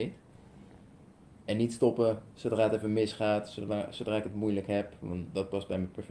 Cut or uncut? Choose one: uncut